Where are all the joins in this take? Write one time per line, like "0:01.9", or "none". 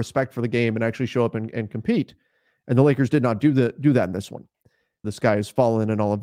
0:05.0